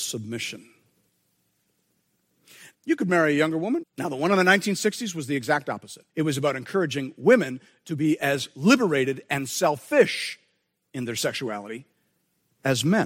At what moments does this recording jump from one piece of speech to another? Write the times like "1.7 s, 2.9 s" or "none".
2.7 s, 3.8 s, 6.1 s